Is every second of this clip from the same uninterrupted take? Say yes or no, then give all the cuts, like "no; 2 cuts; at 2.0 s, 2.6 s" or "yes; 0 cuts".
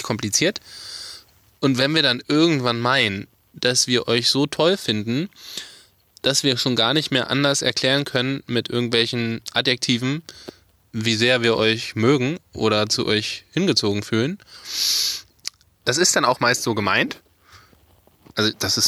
no; 1 cut; at 15.8 s